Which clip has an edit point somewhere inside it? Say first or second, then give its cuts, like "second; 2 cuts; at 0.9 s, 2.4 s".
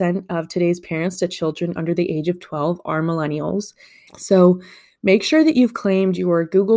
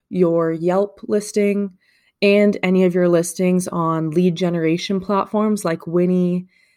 first; 1 cut; at 4.1 s